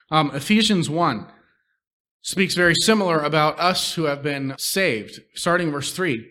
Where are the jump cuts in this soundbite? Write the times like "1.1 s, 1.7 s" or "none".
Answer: 4.5 s